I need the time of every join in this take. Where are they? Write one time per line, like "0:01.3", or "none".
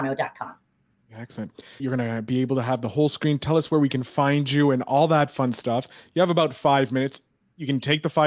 0:01.8